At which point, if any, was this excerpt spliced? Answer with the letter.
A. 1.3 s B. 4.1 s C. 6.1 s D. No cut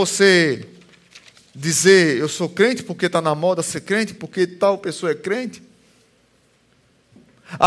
B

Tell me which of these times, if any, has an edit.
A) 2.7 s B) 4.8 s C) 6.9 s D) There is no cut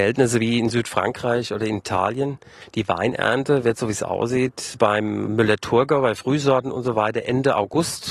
D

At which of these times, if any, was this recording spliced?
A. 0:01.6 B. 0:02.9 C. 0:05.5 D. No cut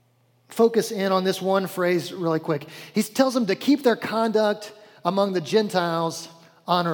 D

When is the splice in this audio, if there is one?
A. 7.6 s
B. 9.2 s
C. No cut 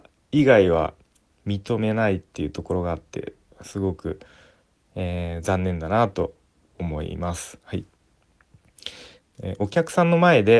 B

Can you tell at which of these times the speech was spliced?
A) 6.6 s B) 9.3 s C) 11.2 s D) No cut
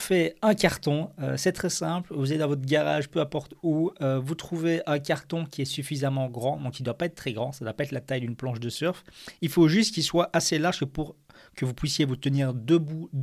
D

